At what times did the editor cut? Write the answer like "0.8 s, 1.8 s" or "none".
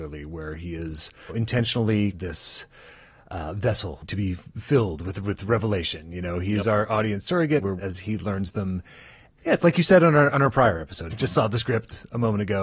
7.8 s, 9.4 s, 11.1 s